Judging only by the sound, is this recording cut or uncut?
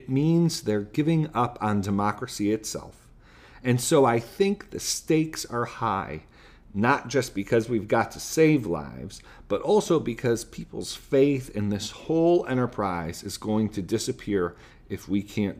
uncut